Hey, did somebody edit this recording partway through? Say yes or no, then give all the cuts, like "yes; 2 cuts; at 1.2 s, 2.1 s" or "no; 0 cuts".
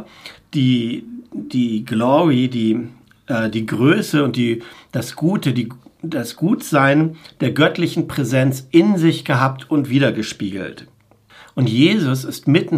no; 0 cuts